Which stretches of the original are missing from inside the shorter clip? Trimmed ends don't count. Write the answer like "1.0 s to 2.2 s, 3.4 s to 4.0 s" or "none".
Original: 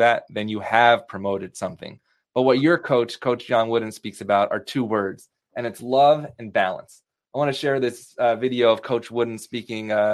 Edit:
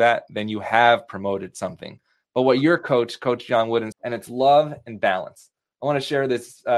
3.9 s to 5.4 s